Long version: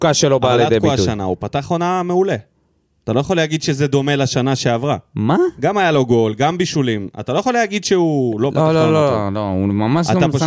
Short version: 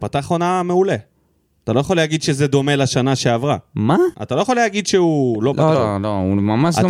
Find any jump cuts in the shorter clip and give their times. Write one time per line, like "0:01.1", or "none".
0:04.1
0:05.7